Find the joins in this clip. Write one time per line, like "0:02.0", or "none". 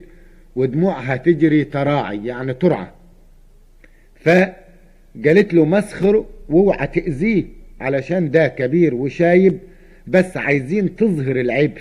none